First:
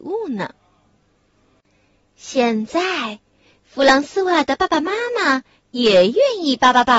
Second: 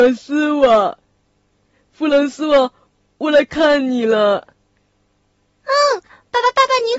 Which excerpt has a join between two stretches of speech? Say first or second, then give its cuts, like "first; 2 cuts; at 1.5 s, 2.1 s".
second; 1 cut; at 6.1 s